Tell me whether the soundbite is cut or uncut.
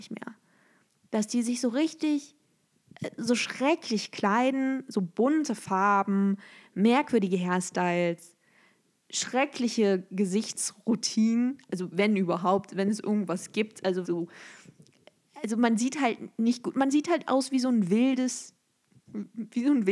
cut